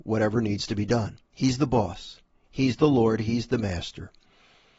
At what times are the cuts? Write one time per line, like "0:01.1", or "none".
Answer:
0:01.3